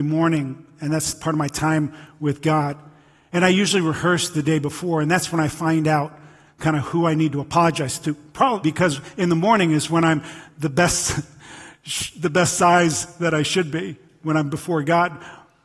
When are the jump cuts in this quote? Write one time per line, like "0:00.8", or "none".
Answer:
0:08.6